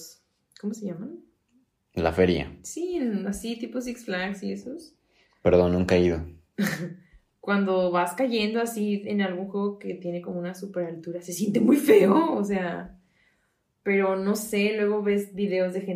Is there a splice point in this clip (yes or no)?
no